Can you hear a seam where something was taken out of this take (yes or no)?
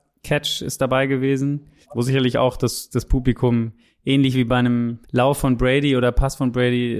yes